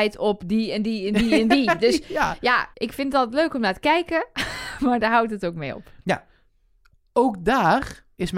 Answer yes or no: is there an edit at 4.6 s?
no